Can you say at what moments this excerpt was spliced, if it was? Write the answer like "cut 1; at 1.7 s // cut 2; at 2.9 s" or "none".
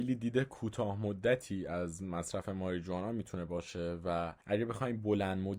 cut 1; at 4.4 s